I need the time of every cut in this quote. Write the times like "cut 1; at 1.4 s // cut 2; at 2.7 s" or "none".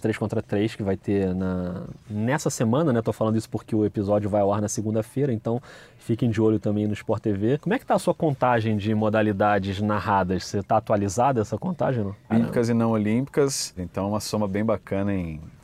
cut 1; at 10.6 s // cut 2; at 12.3 s // cut 3; at 13.8 s